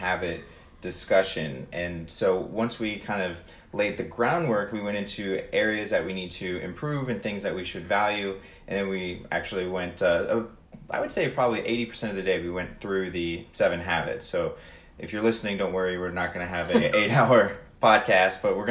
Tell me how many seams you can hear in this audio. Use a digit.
0